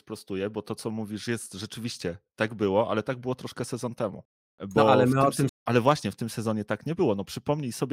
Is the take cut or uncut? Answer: cut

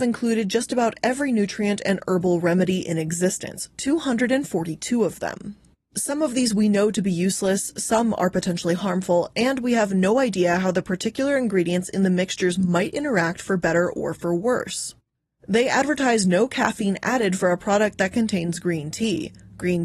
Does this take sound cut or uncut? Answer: uncut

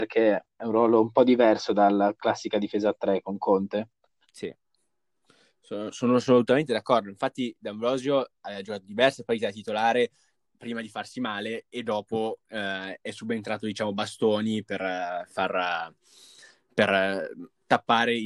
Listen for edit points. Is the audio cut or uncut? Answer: uncut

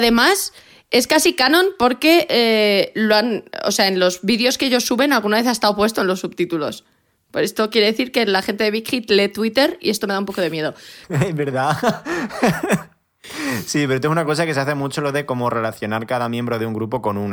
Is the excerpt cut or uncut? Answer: cut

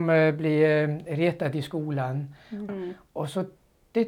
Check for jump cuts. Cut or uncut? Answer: cut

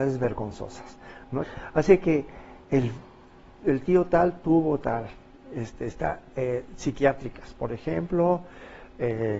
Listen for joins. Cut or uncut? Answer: cut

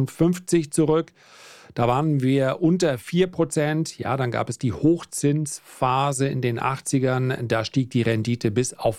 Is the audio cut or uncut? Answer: uncut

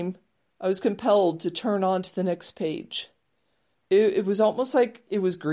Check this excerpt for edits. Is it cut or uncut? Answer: cut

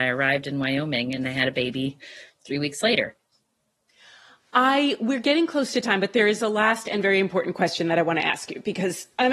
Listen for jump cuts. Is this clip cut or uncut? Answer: uncut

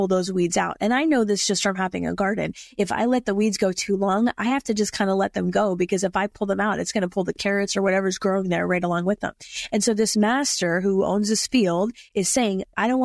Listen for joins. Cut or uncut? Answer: uncut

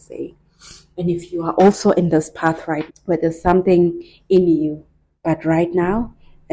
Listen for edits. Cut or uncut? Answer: cut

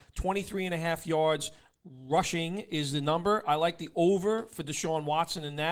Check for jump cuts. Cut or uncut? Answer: uncut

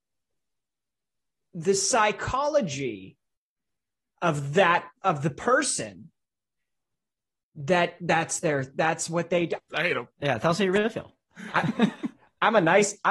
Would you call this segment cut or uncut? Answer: cut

